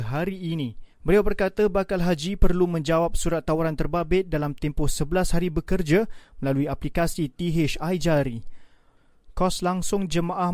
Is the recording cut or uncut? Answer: cut